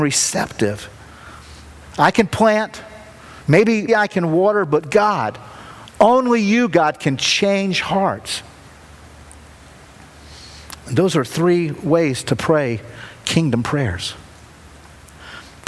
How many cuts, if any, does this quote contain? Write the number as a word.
two